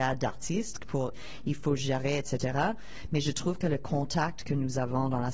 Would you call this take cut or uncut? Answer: cut